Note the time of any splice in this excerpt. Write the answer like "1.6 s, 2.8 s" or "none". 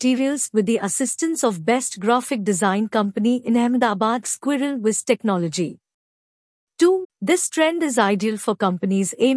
4.2 s, 7.0 s